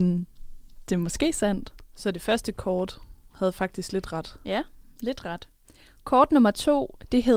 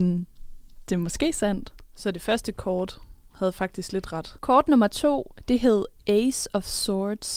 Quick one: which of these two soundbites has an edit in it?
second; 1 cut; at 4.4 s

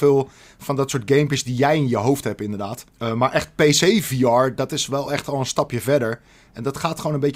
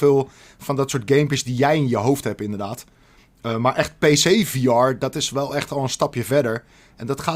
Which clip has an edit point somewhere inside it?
first; 1 cut; at 2.9 s

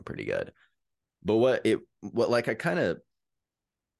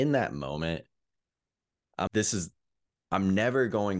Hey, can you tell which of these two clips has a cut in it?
second; 1 cut; at 2.1 s

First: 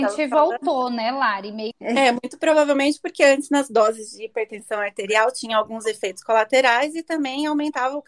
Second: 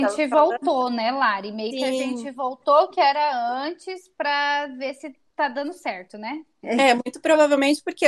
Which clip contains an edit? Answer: first; 1 cut; at 1.7 s

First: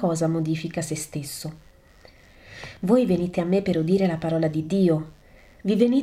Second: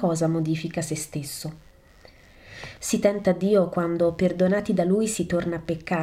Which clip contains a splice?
second; 1 cut; at 2.8 s

